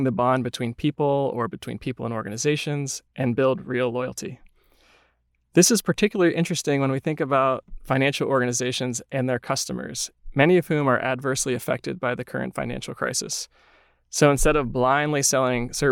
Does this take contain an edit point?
no; 0 cuts

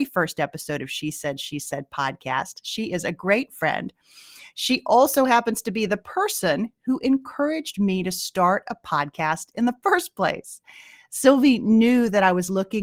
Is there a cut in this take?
no; 0 cuts

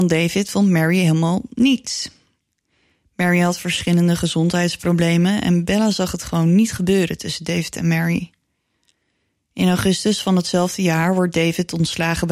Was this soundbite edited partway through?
no; 0 cuts

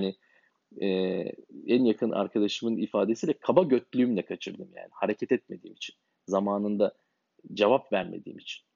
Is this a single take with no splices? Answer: yes; 0 cuts

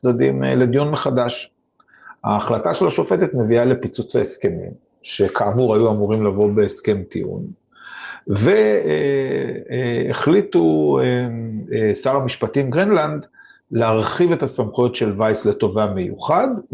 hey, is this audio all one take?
yes; 0 cuts

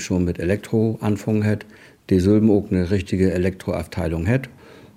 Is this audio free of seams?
yes; 0 cuts

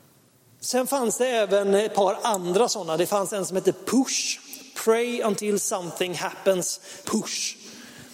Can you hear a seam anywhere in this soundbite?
yes; 1 cut; at 7.0 s

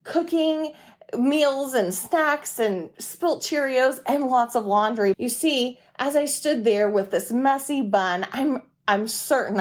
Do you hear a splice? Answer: yes; 1 cut; at 5.1 s

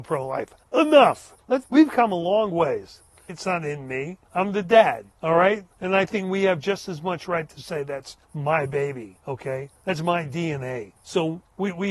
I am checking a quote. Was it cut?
yes; 2 cuts; at 1.6 s, 3.3 s

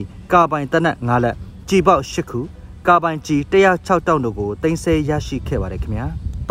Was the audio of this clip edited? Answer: no; 0 cuts

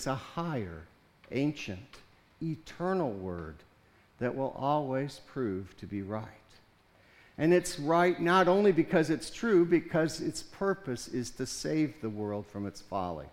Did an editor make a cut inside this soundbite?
no; 0 cuts

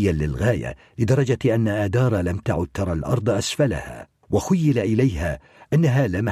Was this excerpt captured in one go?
no; 1 cut; at 4.2 s

